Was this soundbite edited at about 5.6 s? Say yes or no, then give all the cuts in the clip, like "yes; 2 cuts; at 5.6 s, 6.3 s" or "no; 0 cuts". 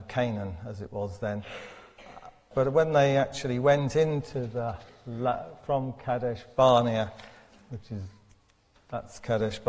no; 1 cut; at 2.5 s